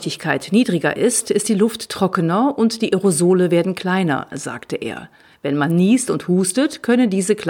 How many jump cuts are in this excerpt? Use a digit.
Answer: 0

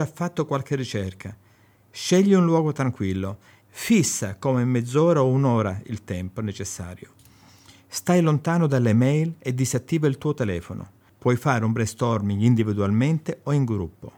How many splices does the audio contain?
2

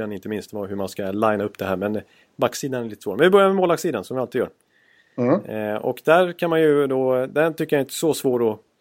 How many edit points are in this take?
0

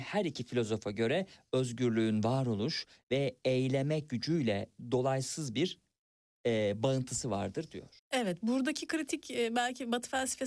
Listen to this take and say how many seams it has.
1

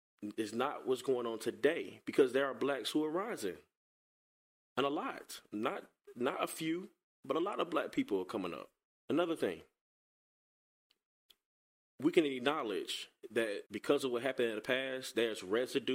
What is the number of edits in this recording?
2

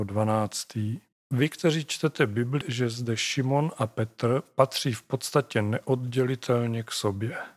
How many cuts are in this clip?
2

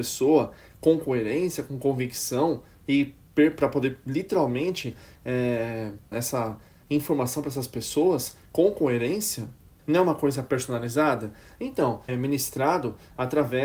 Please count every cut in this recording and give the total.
3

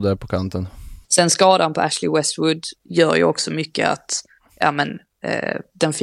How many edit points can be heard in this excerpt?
2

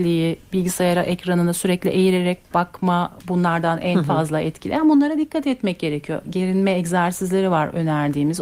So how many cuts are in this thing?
1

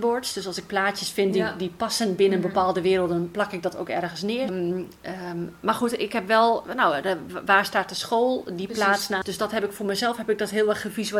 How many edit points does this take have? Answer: 2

